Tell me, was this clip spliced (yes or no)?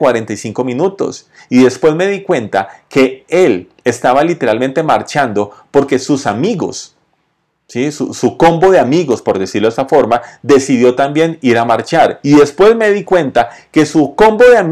no